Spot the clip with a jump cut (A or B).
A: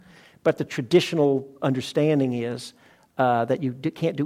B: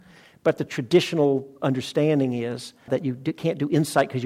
B